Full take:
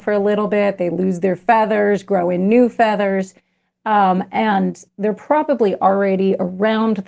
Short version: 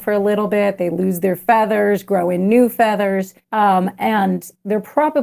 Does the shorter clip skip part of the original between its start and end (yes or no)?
yes